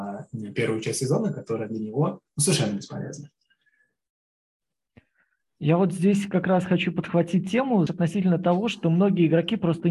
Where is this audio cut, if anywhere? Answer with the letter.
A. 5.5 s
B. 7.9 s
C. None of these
B